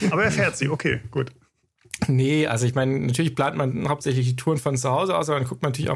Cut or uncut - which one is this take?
uncut